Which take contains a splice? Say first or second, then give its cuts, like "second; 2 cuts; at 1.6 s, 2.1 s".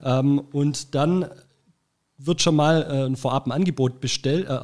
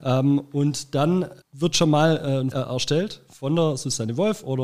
second; 2 cuts; at 1.4 s, 2.5 s